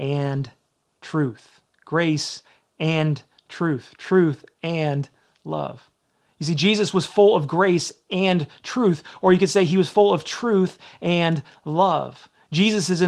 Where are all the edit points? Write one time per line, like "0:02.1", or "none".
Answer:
none